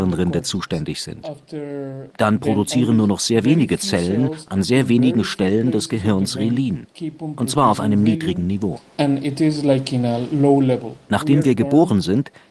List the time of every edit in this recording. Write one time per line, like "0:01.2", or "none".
0:02.1
0:11.1